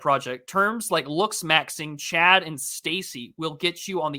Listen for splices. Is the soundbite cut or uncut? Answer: uncut